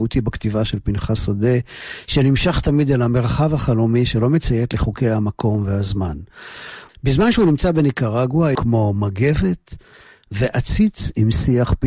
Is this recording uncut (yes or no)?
no